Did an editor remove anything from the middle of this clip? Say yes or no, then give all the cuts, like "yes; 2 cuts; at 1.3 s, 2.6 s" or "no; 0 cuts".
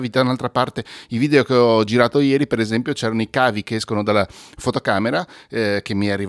no; 0 cuts